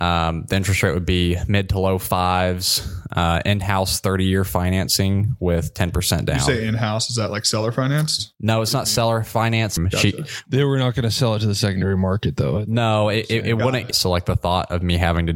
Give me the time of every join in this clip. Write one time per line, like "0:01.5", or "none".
0:09.8
0:13.9